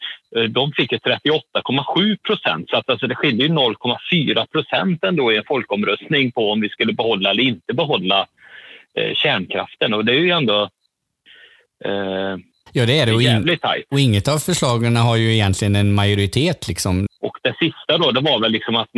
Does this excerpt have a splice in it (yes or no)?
yes